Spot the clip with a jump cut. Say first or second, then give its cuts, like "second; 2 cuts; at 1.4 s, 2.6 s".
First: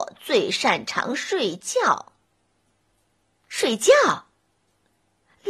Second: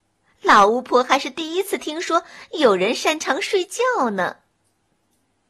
first; 1 cut; at 2.7 s